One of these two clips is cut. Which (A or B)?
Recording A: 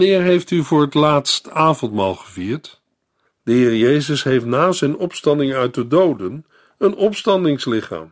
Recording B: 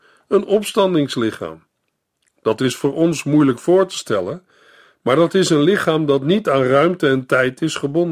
A